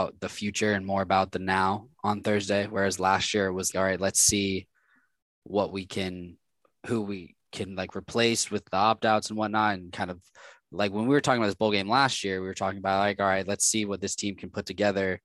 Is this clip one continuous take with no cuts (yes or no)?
no